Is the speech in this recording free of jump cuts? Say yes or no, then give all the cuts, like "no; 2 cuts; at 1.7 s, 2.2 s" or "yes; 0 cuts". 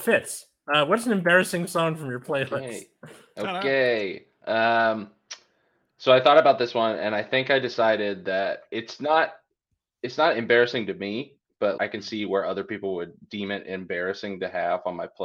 no; 1 cut; at 11.8 s